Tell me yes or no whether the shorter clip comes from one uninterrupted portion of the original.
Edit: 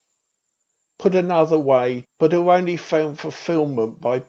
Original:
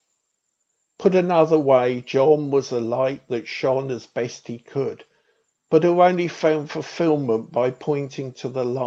no